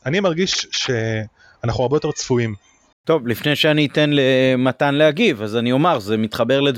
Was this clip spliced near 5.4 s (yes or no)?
no